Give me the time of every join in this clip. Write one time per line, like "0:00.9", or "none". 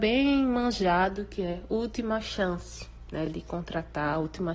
none